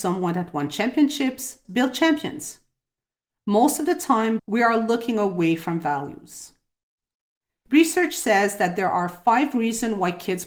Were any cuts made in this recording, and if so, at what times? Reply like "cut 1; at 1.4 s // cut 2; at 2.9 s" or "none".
cut 1; at 1.6 s // cut 2; at 4.4 s